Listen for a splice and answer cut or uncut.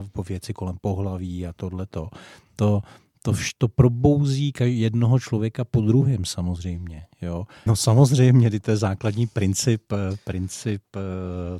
cut